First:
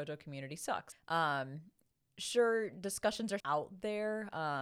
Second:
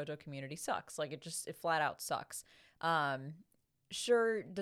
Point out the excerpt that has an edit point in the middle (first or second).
first